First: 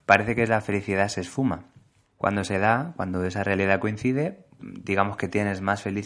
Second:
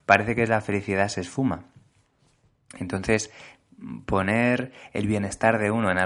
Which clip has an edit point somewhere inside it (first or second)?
first